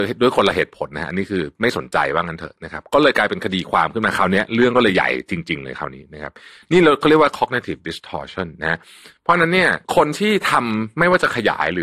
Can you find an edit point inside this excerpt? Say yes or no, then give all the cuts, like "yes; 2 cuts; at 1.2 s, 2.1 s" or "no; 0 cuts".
yes; 1 cut; at 9.8 s